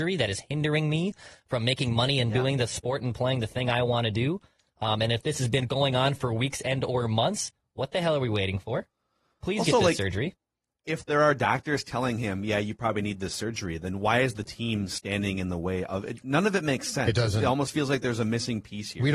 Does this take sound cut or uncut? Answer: uncut